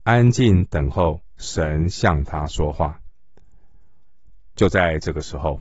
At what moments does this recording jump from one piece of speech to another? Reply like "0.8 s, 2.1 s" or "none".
4.6 s